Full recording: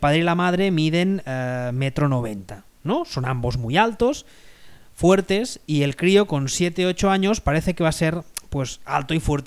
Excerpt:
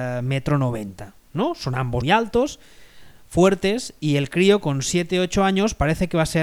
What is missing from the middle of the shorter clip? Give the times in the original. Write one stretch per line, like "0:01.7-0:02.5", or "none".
0:03.5-0:03.7